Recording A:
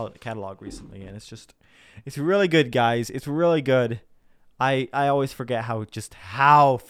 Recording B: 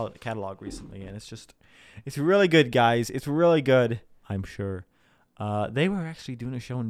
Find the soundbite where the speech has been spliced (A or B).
B